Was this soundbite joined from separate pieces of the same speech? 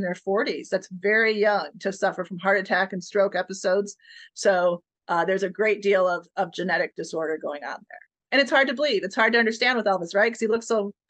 no; 0 cuts

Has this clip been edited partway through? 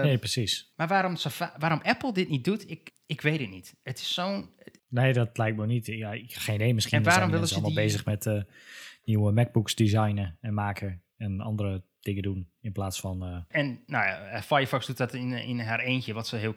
yes; 3 cuts; at 2.9 s, 4.8 s, 13.5 s

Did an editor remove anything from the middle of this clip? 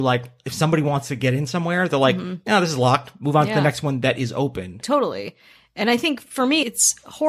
no; 0 cuts

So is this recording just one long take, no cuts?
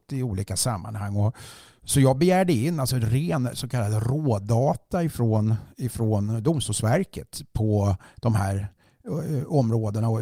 yes; 0 cuts

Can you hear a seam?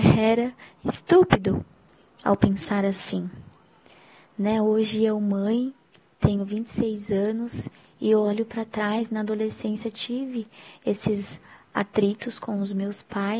no; 0 cuts

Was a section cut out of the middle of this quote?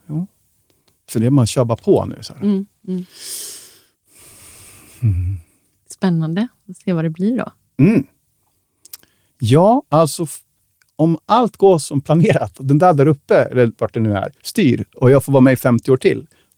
no; 0 cuts

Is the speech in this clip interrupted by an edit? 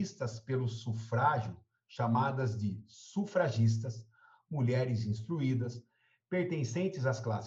no; 0 cuts

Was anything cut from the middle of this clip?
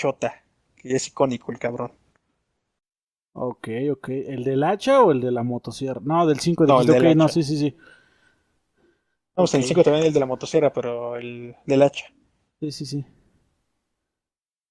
no; 0 cuts

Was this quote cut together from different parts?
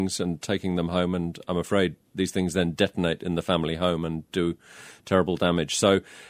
yes; 1 cut; at 2.1 s

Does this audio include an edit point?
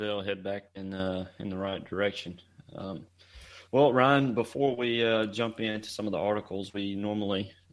no; 0 cuts

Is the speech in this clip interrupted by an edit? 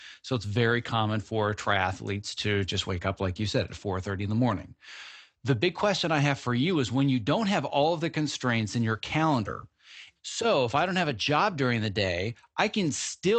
yes; 1 cut; at 10.2 s

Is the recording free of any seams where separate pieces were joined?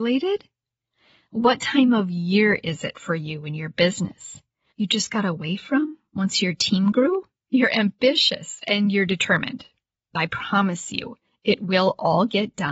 no; 2 cuts; at 4.7 s, 7.5 s

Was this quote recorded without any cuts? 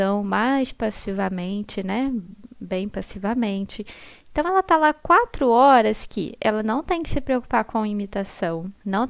yes; 0 cuts

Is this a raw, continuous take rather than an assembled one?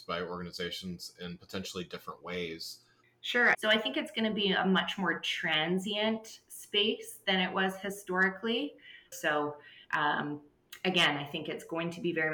no; 2 cuts; at 3.5 s, 9.1 s

